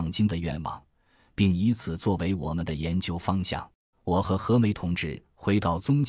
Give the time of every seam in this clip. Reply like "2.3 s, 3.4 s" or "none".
3.9 s